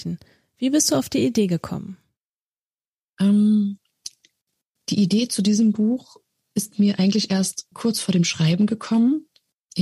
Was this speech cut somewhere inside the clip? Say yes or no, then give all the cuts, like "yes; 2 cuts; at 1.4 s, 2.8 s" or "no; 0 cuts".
yes; 1 cut; at 7.7 s